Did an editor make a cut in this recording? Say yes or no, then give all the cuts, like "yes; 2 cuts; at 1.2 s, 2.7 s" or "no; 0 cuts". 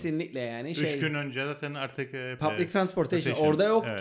yes; 1 cut; at 2.4 s